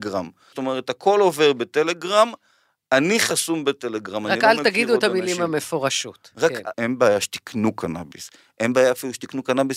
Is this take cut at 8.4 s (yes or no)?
no